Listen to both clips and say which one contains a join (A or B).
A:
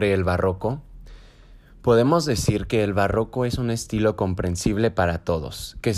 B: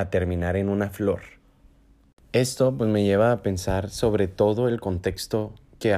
B